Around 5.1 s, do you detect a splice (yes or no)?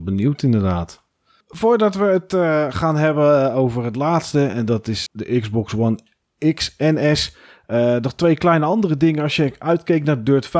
yes